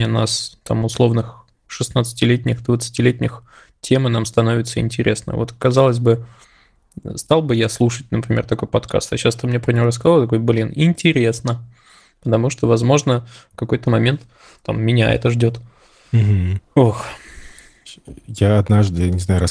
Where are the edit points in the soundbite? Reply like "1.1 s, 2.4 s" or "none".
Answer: none

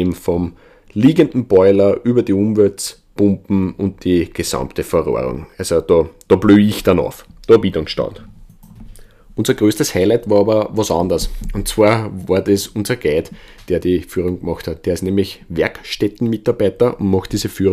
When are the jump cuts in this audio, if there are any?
none

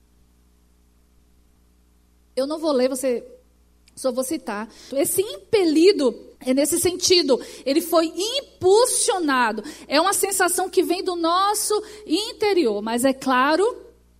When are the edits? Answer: 4.9 s, 6.4 s

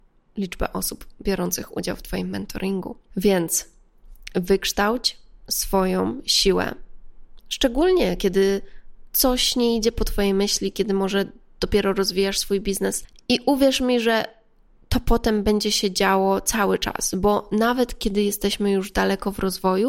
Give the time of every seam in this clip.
none

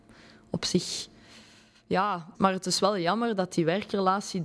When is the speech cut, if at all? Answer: 2.3 s

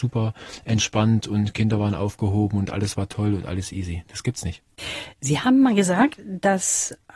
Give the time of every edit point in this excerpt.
none

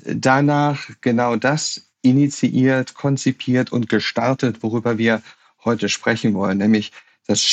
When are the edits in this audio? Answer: none

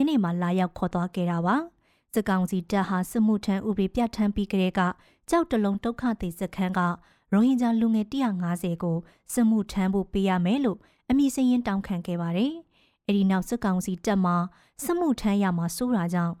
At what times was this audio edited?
none

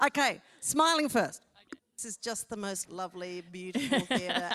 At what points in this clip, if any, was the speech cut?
1.8 s, 2.8 s

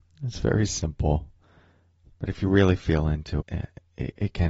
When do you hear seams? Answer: 2.1 s, 3.4 s

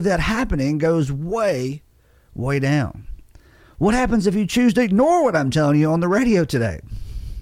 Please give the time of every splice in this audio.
none

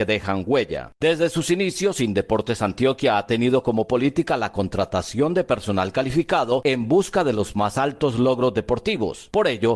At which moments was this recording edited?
none

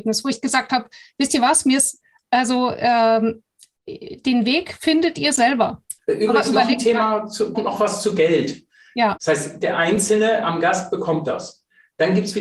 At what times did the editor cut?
6.0 s, 7.5 s, 9.2 s

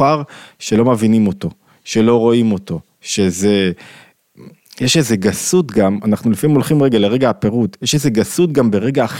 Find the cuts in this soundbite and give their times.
none

